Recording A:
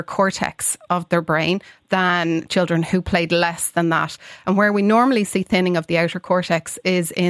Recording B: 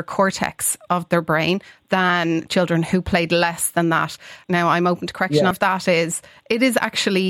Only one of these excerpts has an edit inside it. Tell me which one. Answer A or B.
B